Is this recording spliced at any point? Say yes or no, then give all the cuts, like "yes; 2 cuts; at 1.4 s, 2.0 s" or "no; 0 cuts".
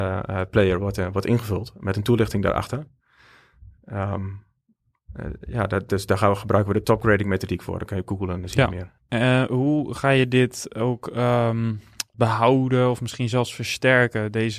yes; 2 cuts; at 9.0 s, 12.1 s